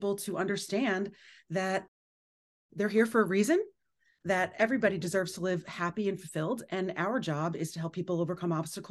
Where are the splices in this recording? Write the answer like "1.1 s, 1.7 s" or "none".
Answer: none